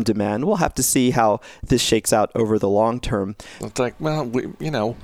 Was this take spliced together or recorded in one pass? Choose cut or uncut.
cut